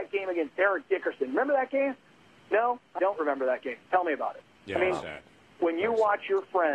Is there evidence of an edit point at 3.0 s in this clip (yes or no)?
yes